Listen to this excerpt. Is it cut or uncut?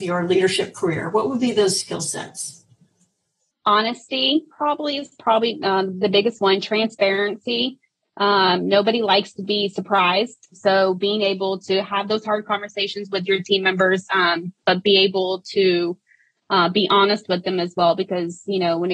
uncut